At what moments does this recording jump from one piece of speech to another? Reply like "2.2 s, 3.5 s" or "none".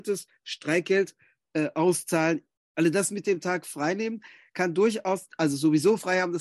2.6 s